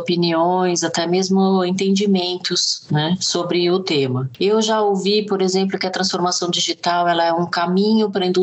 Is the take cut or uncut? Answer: uncut